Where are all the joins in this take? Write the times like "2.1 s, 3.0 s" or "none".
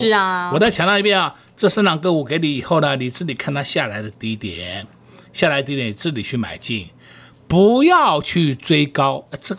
none